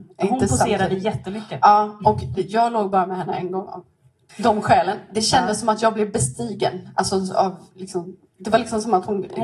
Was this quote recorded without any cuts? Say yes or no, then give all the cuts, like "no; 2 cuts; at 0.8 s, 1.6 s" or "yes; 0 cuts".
no; 1 cut; at 2.3 s